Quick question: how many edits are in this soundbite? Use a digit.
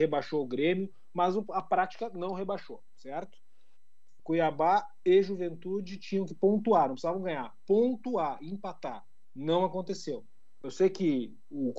2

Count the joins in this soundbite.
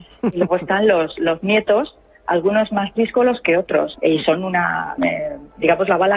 2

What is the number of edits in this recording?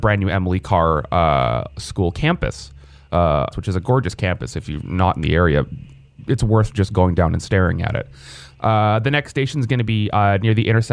1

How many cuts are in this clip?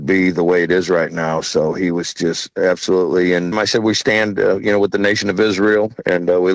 1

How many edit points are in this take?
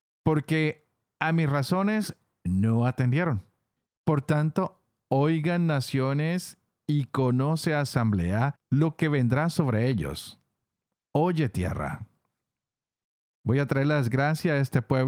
1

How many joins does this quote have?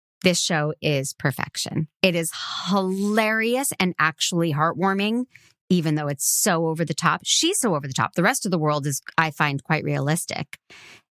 0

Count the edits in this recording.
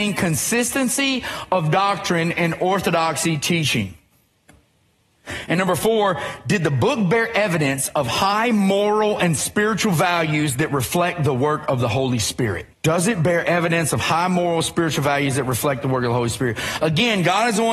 1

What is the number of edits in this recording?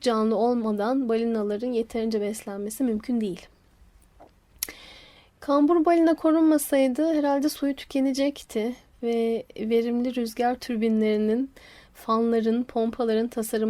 0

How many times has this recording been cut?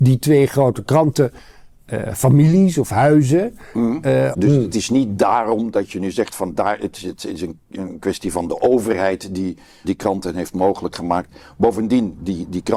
2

